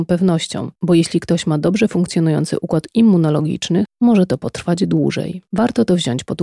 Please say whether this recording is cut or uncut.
uncut